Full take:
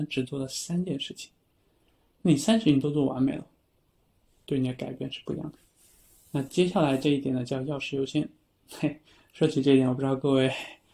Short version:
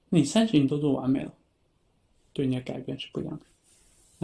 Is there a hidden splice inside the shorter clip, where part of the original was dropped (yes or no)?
no